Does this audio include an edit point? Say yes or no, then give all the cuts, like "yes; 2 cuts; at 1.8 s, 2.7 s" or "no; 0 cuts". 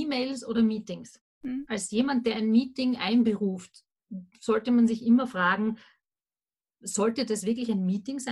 no; 0 cuts